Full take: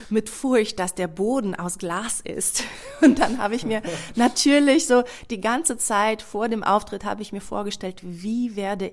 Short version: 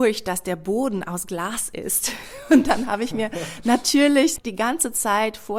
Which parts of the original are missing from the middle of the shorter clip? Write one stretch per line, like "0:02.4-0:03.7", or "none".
0:04.9-0:05.2